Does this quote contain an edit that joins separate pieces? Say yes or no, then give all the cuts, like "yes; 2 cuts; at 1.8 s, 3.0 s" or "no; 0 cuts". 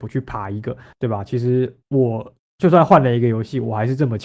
yes; 1 cut; at 0.9 s